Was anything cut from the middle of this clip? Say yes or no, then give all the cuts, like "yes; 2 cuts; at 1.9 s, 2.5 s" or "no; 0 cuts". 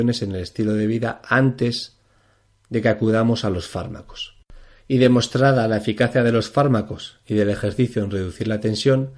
no; 0 cuts